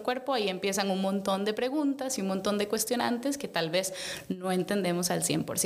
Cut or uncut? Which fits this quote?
uncut